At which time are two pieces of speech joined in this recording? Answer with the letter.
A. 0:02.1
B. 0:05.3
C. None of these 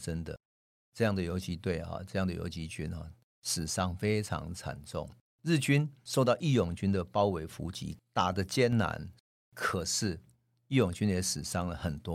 B